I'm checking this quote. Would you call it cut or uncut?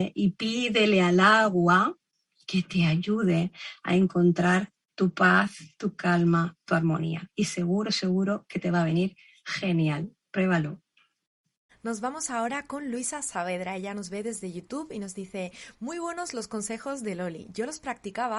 cut